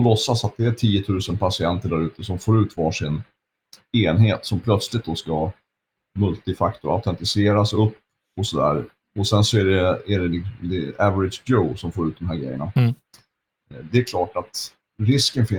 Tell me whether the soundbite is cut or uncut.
uncut